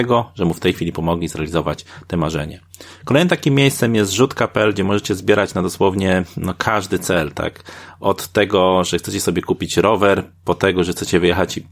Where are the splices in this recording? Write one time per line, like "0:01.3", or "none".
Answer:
none